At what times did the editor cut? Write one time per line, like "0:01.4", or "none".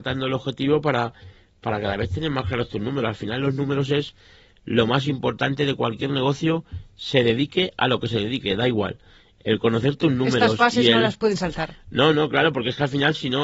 none